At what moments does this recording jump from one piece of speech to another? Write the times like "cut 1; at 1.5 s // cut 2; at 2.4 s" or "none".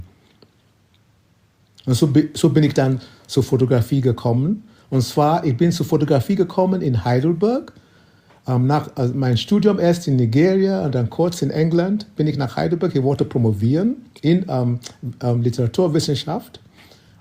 none